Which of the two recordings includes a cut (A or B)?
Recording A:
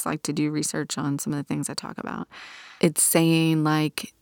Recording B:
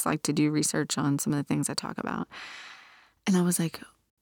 A